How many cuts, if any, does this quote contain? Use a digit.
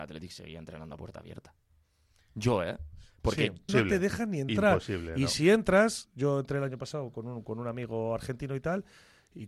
1